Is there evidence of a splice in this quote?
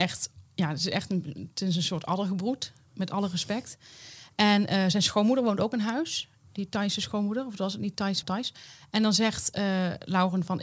yes; 1 cut; at 8.2 s

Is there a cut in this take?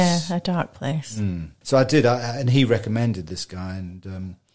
yes; 1 cut; at 1.6 s

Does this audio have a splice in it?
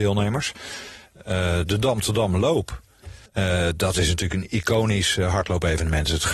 yes; 1 cut; at 3.3 s

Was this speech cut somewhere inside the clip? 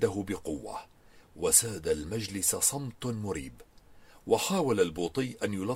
no; 0 cuts

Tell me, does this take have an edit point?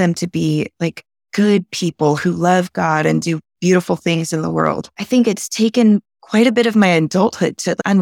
yes; 1 cut; at 5.0 s

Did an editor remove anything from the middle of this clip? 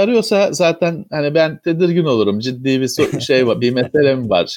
no; 0 cuts

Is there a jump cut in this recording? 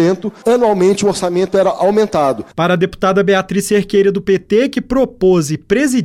yes; 1 cut; at 2.5 s

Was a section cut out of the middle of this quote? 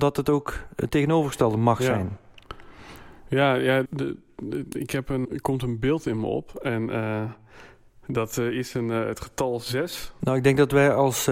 yes; 3 cuts; at 3.8 s, 5.2 s, 10.2 s

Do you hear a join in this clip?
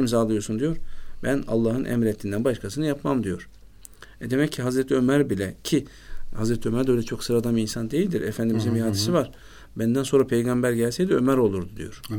no; 0 cuts

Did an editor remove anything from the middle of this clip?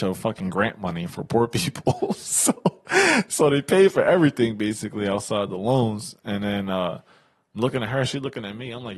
no; 0 cuts

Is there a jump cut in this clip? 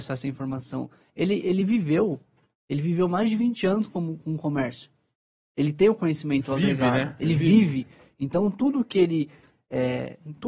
no; 0 cuts

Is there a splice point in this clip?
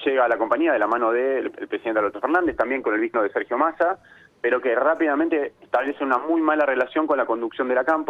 yes; 1 cut; at 3.1 s

